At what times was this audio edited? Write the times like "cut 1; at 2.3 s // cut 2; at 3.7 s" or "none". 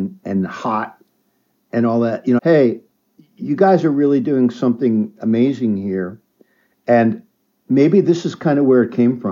cut 1; at 2.4 s